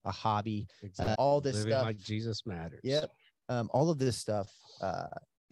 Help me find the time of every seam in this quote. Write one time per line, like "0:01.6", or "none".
0:01.1